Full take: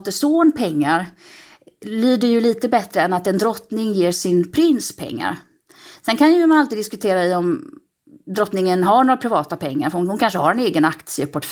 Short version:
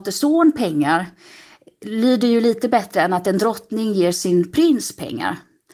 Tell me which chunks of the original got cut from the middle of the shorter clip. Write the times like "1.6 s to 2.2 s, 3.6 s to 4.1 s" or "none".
none